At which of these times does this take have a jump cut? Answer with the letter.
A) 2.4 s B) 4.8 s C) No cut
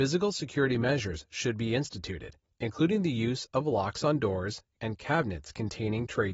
B